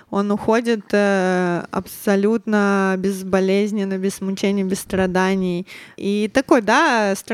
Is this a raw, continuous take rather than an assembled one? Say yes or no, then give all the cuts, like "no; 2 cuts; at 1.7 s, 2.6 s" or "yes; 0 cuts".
no; 1 cut; at 6.0 s